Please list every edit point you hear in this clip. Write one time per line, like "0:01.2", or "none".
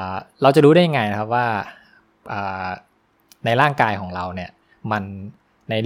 none